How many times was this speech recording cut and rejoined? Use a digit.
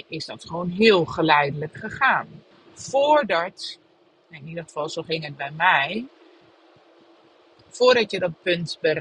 1